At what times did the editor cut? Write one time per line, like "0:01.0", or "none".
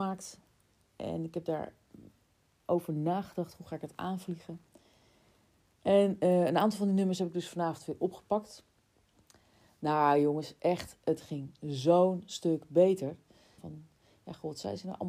0:13.6